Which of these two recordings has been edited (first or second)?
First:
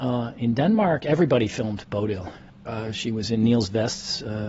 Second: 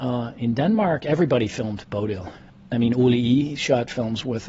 first